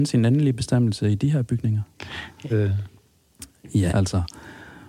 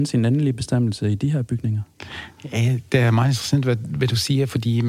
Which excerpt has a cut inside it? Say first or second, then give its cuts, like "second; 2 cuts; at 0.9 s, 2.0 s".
first; 2 cuts; at 2.5 s, 3.9 s